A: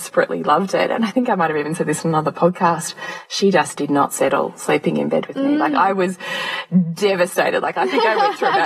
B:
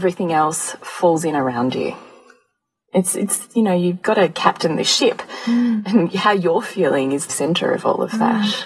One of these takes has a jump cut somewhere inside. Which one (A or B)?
B